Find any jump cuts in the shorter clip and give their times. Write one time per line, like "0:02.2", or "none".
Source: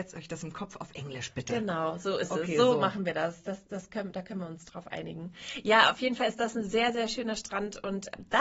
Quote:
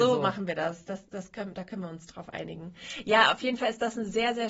none